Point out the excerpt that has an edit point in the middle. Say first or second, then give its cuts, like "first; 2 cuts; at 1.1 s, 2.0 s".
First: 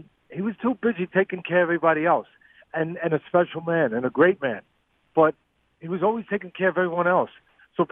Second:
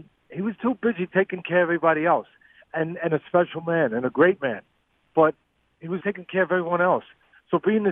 second; 1 cut; at 6.0 s